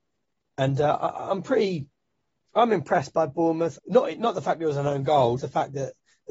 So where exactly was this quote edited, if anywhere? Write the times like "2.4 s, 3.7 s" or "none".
3.7 s, 5.4 s